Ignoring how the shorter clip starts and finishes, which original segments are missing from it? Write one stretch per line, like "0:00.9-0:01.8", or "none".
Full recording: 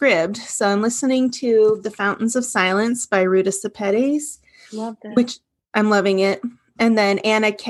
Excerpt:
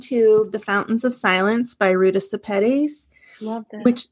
none

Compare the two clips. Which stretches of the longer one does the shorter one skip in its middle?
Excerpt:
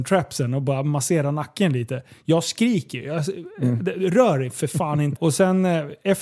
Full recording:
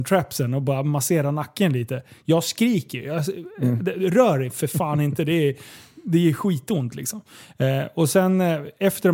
0:05.2-0:07.9

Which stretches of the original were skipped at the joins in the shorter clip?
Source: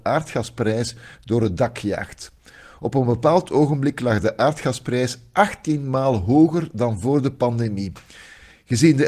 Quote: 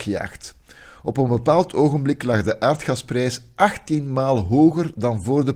none

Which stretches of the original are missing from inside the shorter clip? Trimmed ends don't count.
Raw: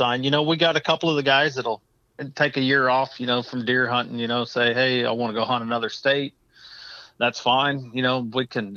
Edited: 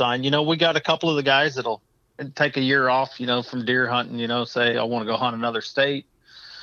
0:04.7-0:05.0

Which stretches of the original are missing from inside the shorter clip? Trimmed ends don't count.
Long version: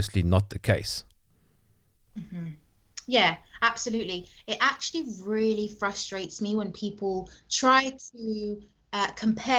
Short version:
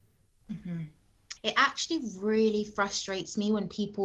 0:03.0-0:04.4

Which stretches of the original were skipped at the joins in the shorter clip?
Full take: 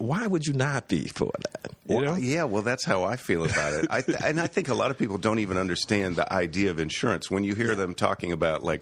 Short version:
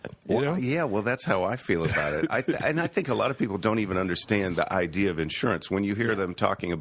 none

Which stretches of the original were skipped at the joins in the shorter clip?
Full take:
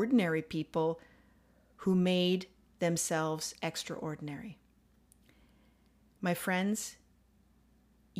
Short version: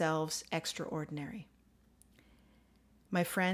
none

